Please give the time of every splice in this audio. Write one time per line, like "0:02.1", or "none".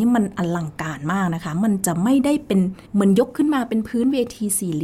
0:02.8